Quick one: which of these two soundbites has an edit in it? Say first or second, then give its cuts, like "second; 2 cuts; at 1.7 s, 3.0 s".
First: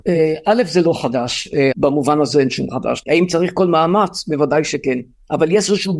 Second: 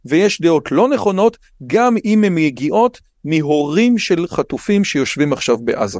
first; 2 cuts; at 1.7 s, 3.0 s